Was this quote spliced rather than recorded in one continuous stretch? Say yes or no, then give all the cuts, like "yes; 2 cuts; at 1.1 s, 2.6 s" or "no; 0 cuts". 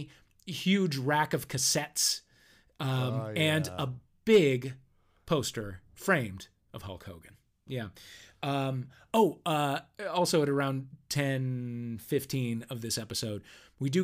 yes; 1 cut; at 7.7 s